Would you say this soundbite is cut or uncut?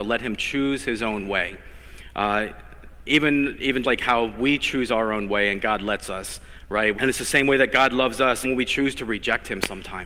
cut